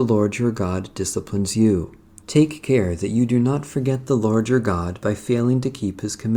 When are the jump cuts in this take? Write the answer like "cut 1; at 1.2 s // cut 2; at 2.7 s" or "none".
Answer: cut 1; at 2.2 s